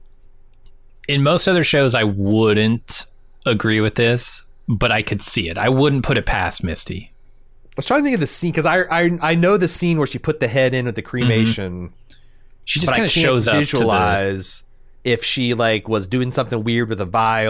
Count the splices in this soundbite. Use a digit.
0